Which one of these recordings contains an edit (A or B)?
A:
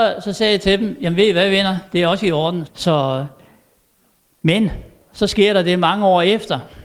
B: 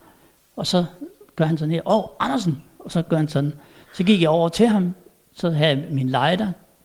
A